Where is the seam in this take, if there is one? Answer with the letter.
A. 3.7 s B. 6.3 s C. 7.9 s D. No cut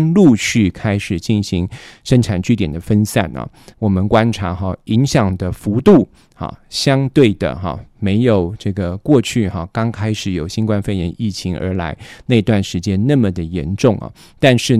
A